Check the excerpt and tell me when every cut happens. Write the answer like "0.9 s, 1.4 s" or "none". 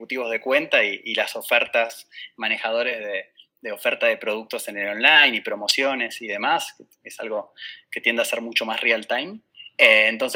none